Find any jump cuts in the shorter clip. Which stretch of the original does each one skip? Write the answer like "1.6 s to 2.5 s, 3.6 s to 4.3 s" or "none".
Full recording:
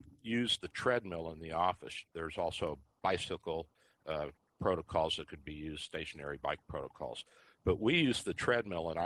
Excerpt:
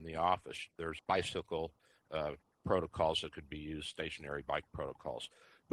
2.4 s to 2.9 s